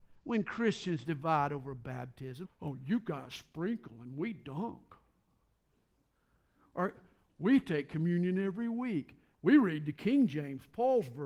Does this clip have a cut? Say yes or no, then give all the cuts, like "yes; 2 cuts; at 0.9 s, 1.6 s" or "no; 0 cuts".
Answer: yes; 2 cuts; at 2.4 s, 9.3 s